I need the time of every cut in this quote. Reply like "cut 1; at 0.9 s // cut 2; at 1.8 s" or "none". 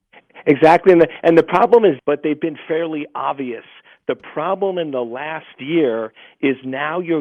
cut 1; at 2.0 s

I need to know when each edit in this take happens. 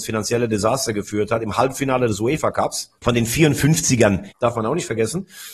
cut 1; at 3.0 s // cut 2; at 4.3 s

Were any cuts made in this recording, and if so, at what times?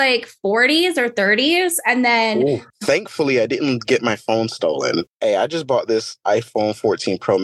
cut 1; at 2.7 s // cut 2; at 5.1 s

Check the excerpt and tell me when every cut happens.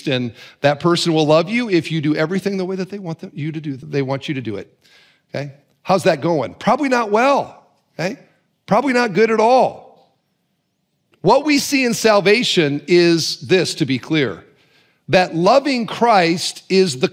cut 1; at 3.8 s

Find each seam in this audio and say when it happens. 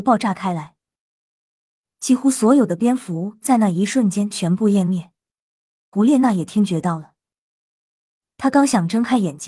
cut 1; at 5.9 s

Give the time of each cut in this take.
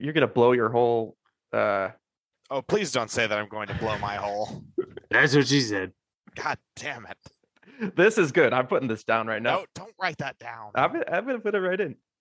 none

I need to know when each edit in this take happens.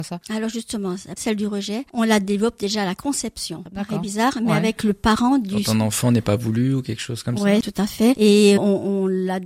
cut 1; at 1.2 s // cut 2; at 8.6 s

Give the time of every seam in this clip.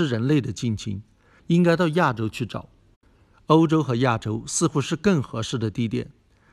cut 1; at 1.4 s // cut 2; at 3.3 s

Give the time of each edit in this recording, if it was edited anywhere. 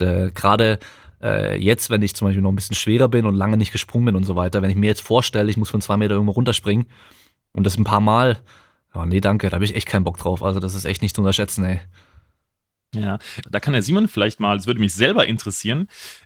cut 1; at 13.4 s

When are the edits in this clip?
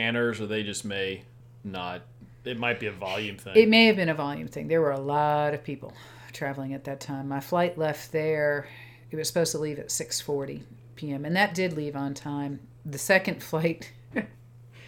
none

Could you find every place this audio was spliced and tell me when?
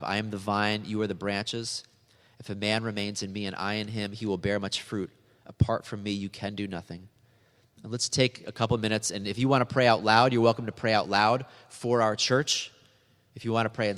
none

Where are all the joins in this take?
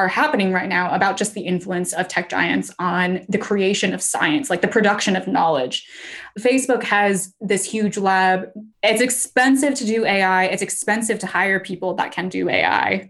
cut 1; at 8.7 s

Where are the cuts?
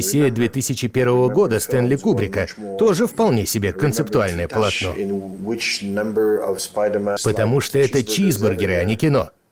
cut 1; at 7.2 s

